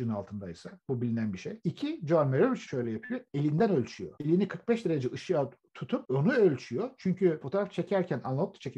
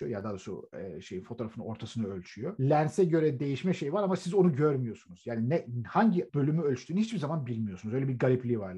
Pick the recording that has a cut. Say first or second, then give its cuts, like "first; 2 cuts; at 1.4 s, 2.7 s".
first; 1 cut; at 1.6 s